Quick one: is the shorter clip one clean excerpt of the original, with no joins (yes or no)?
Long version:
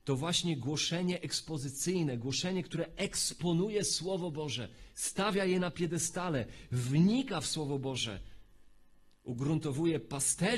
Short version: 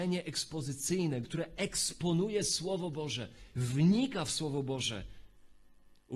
no